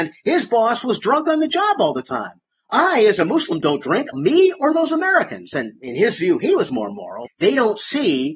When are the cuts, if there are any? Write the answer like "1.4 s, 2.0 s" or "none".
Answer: 4.1 s, 7.3 s

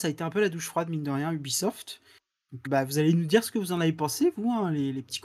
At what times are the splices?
2.7 s

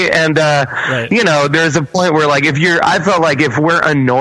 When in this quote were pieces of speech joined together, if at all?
none

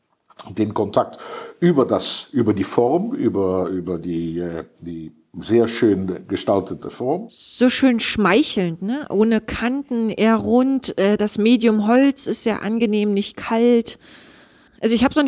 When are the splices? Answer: none

